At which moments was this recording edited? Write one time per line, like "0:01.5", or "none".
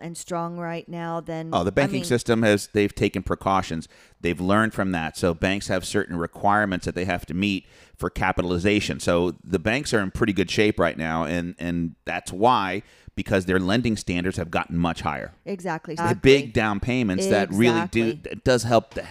0:16.0